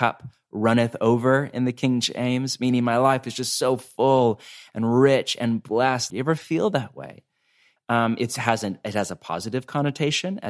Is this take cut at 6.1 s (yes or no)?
yes